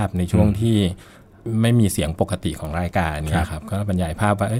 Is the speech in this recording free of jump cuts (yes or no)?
yes